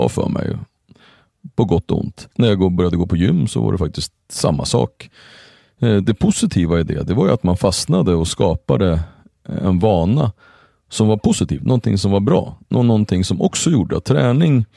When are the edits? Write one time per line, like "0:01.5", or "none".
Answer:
0:02.3